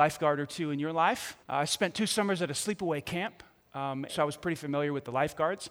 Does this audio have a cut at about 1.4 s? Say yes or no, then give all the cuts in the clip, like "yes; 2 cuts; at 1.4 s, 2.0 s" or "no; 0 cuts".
yes; 2 cuts; at 1.4 s, 4.1 s